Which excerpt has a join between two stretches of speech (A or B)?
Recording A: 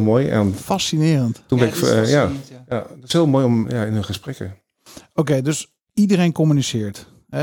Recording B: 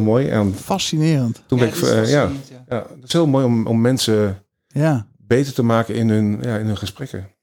A